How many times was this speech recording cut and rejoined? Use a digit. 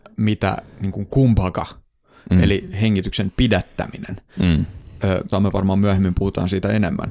1